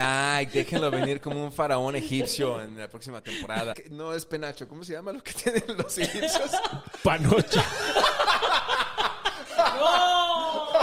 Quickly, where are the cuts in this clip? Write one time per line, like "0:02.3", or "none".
0:03.7